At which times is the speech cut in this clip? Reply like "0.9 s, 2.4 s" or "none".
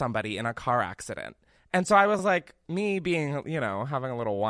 none